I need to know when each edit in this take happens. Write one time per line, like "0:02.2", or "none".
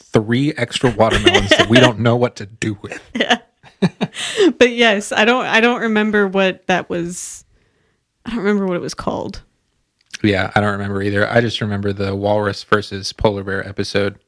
none